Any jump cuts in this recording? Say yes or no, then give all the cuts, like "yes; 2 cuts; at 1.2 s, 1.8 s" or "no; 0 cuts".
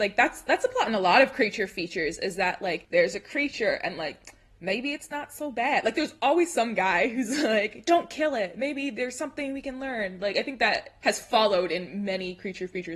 no; 0 cuts